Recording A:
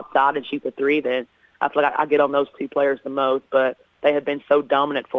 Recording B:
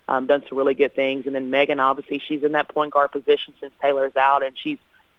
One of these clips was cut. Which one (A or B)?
A